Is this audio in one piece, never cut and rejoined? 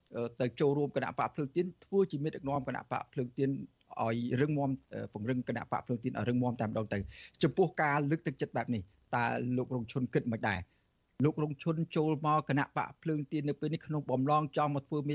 yes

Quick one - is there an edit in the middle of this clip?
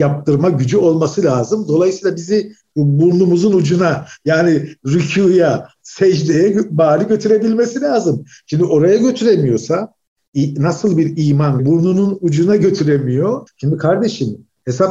yes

